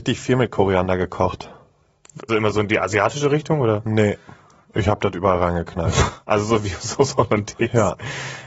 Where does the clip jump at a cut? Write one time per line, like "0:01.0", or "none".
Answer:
0:02.3

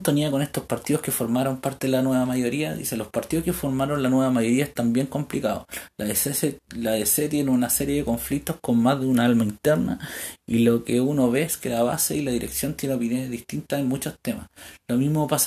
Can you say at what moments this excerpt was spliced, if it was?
none

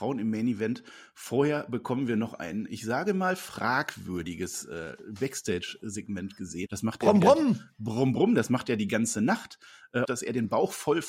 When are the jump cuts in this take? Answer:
0:06.7
0:10.0

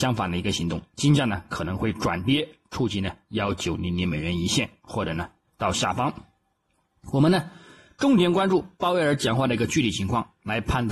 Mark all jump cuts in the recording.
none

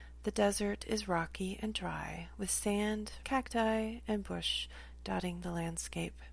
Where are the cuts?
0:03.2

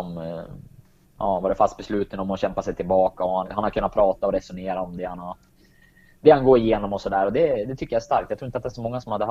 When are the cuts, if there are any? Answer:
0:03.4

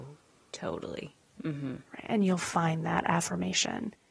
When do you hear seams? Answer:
0:01.4

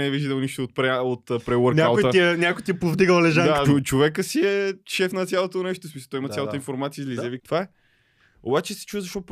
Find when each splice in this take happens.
0:03.7
0:07.4

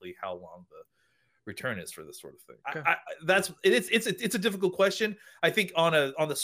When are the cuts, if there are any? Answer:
0:02.6

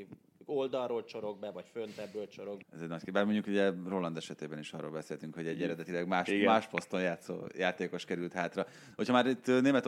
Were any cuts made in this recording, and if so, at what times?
0:02.6

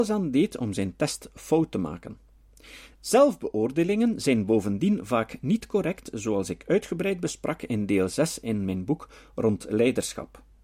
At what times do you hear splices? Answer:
0:02.9

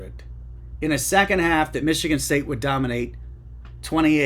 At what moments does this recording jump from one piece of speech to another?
none

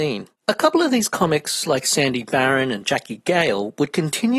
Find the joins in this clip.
none

